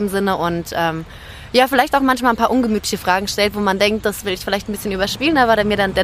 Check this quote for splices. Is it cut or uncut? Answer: uncut